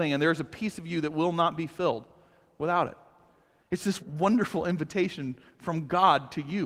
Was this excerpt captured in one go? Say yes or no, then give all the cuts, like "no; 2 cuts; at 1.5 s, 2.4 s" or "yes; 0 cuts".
no; 1 cut; at 4.0 s